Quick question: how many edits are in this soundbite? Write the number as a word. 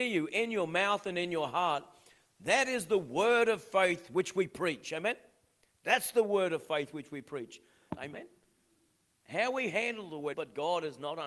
two